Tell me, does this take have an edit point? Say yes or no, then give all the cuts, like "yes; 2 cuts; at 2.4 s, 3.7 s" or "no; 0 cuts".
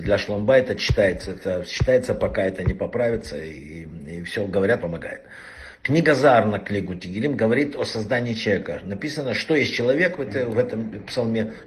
yes; 1 cut; at 4.8 s